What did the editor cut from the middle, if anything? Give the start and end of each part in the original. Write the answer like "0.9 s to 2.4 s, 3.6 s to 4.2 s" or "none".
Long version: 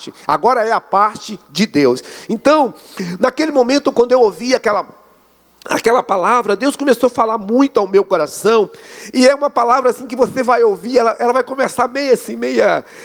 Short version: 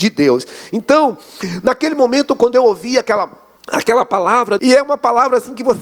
5.1 s to 5.5 s, 6.6 s to 9.1 s